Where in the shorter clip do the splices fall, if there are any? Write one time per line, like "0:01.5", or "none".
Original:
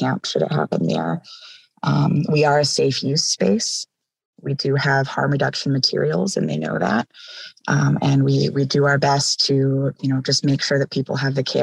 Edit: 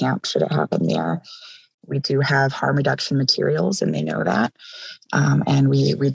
0:01.7